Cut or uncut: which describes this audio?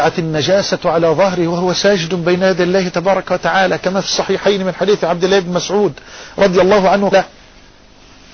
cut